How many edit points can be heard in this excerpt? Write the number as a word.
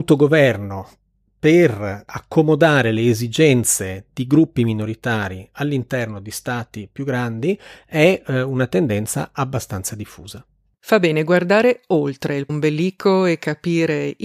one